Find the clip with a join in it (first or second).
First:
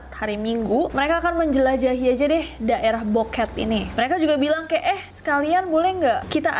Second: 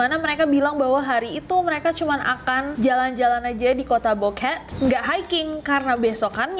first